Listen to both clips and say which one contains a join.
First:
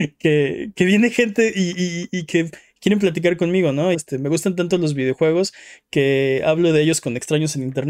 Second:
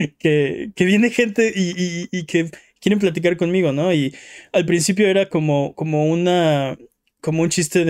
first; 1 cut; at 3.9 s

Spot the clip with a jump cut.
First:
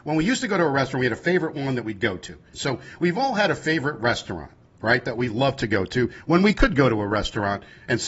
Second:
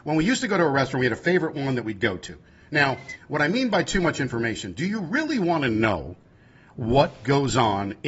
first; 1 cut; at 2.5 s

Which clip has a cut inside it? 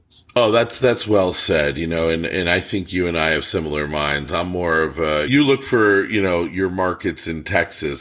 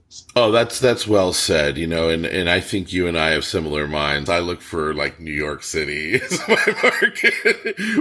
second; 1 cut; at 4.3 s

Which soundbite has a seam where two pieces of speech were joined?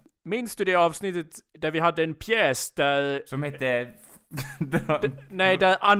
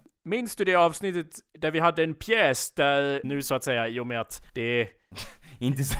second; 2 cuts; at 3.2 s, 4.5 s

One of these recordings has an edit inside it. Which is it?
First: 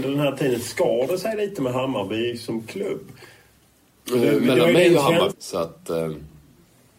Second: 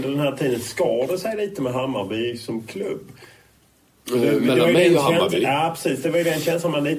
first; 1 cut; at 5.3 s

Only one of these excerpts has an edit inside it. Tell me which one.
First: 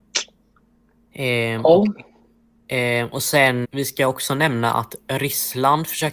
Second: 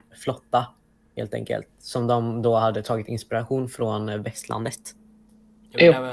first; 1 cut; at 3.6 s

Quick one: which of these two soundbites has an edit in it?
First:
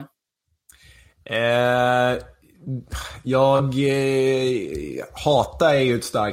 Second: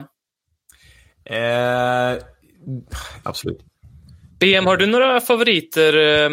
second; 1 cut; at 3.2 s

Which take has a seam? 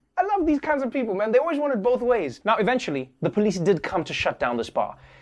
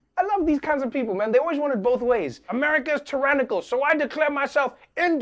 first; 1 cut; at 2.4 s

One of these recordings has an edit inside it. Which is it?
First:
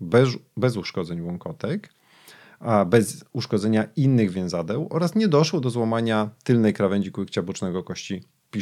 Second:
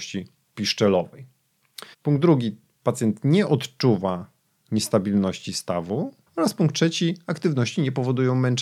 second; 2 cuts; at 1.9 s, 6.3 s

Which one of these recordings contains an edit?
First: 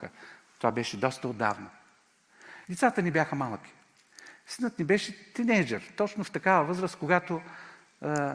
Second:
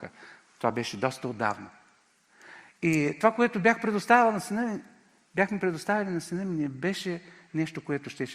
first; 1 cut; at 2.6 s

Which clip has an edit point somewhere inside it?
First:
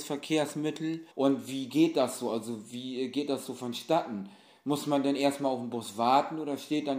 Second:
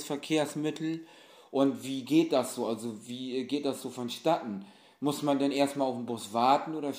first; 1 cut; at 1.1 s

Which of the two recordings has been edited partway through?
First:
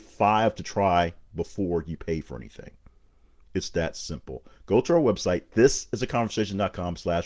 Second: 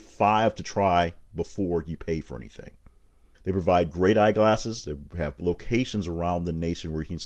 second; 2 cuts; at 3.3 s, 4.8 s

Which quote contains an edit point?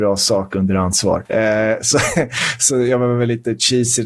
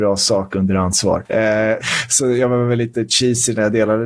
second; 1 cut; at 1.8 s

